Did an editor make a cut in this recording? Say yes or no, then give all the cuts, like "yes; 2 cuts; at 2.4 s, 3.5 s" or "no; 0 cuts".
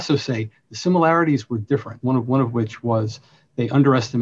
yes; 1 cut; at 2.0 s